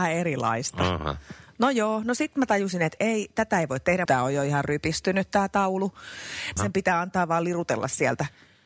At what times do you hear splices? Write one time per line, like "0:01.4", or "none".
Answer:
0:03.0
0:04.1
0:06.6

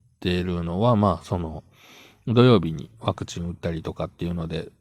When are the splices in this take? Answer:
none

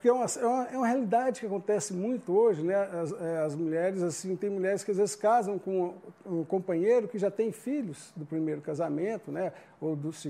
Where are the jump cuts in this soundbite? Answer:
none

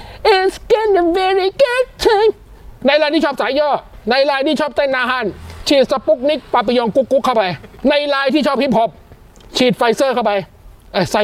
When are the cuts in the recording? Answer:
none

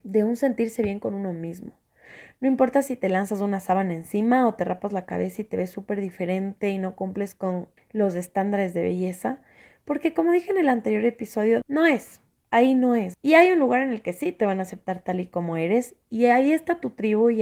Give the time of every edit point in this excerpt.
0:07.8
0:11.6
0:13.1

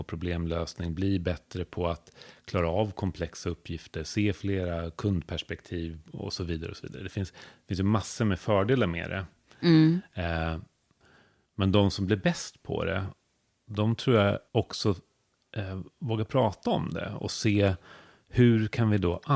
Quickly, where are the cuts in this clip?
0:14.5

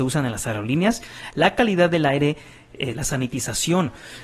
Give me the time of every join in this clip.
0:02.9

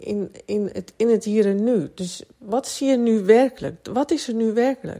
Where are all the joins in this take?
none

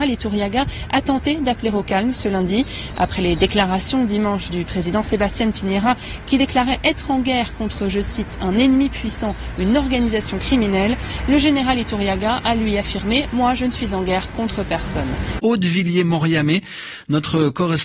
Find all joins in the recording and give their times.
0:15.4

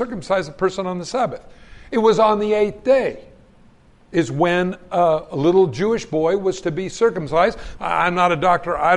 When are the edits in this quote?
0:07.8

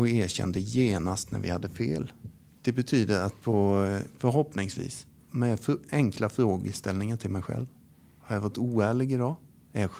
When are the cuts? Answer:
0:04.2

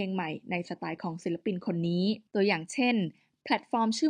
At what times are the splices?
0:02.3

